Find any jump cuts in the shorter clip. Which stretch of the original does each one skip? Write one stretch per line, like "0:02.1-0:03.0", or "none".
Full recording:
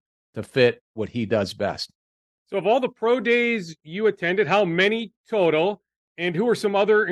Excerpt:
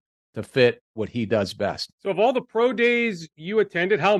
0:01.9-0:02.4